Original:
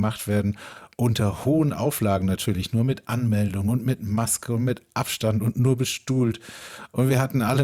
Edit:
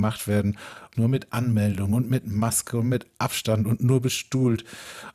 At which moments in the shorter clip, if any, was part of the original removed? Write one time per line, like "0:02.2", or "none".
0:00.9